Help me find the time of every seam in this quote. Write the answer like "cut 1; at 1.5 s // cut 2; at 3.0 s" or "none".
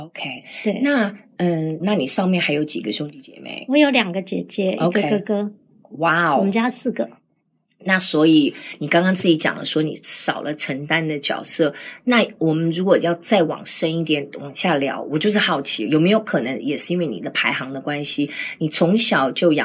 cut 1; at 1.8 s